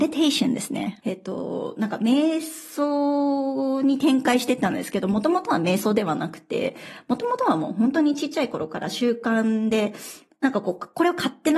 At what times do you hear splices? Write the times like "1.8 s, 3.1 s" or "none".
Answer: 1.0 s